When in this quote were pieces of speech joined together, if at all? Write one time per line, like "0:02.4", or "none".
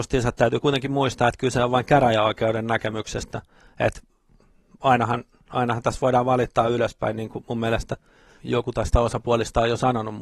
0:08.4